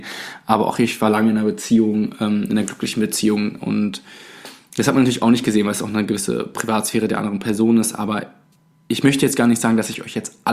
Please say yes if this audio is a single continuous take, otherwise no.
yes